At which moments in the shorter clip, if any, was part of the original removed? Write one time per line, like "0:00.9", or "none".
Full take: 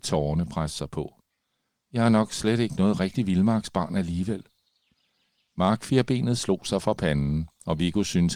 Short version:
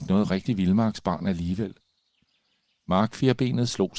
none

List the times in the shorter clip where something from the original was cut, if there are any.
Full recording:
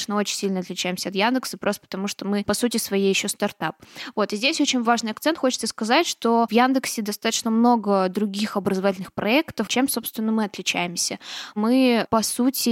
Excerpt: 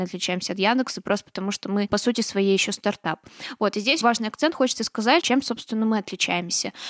0:04.0
0:05.2

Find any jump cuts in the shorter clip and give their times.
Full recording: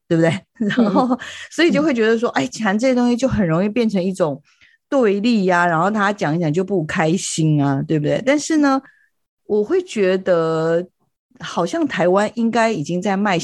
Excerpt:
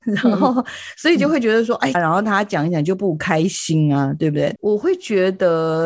0:01.9
0:04.6

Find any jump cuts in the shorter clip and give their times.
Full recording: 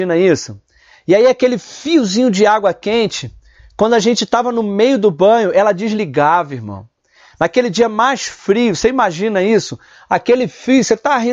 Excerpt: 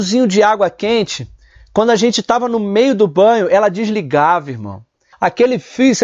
0:05.1

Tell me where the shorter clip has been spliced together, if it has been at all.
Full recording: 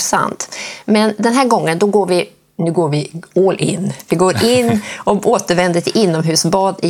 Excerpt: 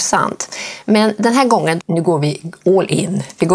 0:01.8

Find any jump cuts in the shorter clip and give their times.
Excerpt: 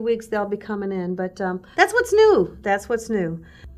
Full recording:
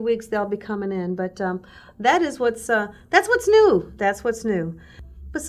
0:01.7

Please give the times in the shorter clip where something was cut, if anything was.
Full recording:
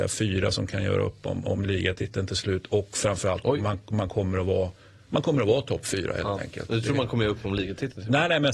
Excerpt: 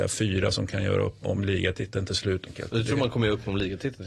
0:01.2
0:02.5

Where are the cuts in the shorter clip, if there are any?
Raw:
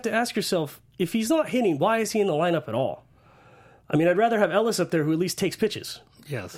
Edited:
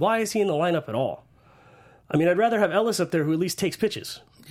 none

